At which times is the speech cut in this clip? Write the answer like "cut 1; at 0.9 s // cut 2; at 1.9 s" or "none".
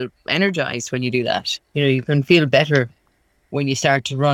none